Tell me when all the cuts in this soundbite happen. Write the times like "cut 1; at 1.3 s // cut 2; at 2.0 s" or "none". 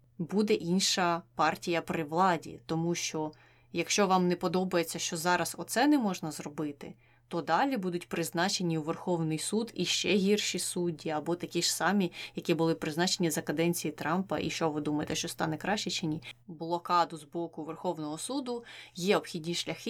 cut 1; at 16.4 s

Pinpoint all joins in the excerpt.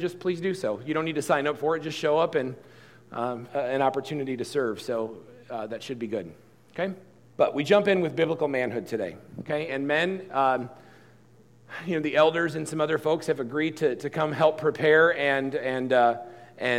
cut 1; at 3.5 s // cut 2; at 7.3 s // cut 3; at 9.7 s

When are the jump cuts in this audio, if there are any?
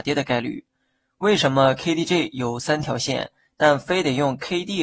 none

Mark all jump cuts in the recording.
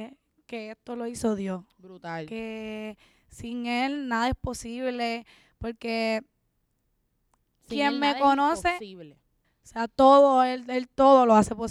cut 1; at 9.4 s

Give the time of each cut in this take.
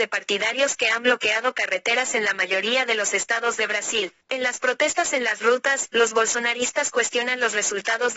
cut 1; at 4.2 s

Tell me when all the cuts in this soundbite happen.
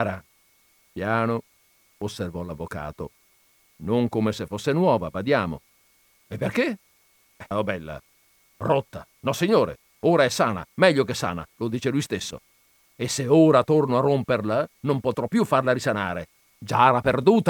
cut 1; at 7.5 s

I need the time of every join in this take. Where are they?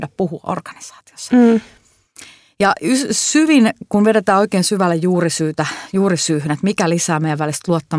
none

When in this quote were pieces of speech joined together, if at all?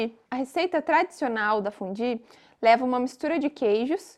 none

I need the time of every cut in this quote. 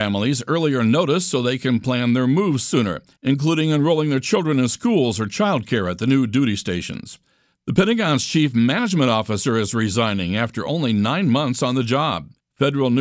cut 1; at 7.6 s

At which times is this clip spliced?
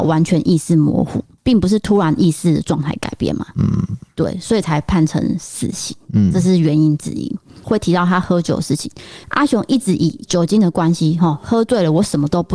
cut 1; at 7.6 s // cut 2; at 9.2 s

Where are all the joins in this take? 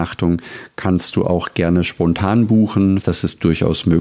cut 1; at 3.0 s

